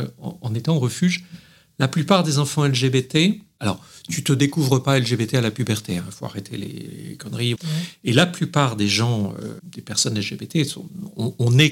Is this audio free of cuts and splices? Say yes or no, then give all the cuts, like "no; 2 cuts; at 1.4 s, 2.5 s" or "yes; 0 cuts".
no; 1 cut; at 7.6 s